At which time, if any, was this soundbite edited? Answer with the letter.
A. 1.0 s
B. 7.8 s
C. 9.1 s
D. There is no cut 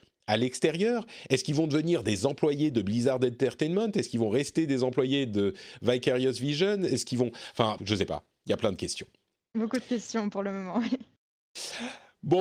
B